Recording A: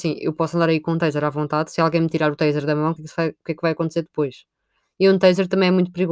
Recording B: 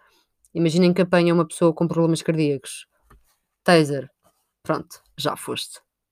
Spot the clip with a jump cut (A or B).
A